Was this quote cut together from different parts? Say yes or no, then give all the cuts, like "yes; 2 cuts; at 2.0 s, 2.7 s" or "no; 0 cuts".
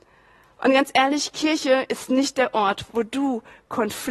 yes; 1 cut; at 2.9 s